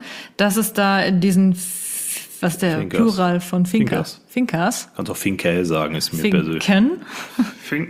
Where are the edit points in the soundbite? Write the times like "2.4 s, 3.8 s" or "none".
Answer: none